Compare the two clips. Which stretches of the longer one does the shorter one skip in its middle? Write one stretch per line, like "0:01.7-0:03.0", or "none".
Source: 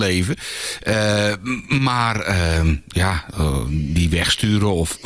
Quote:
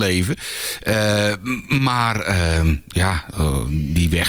none